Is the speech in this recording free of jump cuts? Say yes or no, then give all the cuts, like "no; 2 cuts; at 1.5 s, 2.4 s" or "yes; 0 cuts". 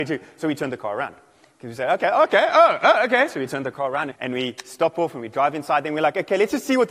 no; 1 cut; at 4.1 s